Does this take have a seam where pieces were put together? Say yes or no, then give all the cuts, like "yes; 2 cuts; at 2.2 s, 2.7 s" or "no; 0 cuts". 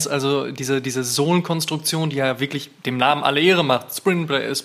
yes; 1 cut; at 2.8 s